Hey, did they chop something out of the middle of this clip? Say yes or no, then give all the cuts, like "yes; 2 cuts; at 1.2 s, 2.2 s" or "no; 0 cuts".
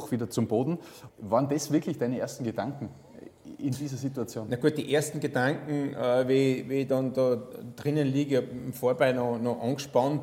yes; 1 cut; at 1.1 s